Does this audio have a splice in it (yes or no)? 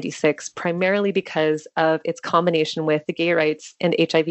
no